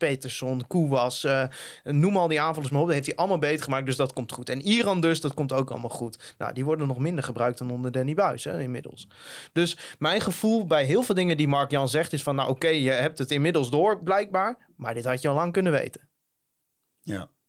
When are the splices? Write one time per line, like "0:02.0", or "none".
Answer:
none